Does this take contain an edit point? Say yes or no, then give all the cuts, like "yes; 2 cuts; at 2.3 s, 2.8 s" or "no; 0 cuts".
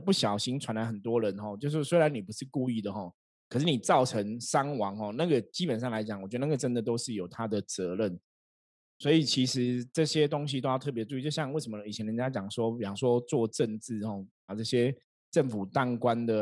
yes; 1 cut; at 14.5 s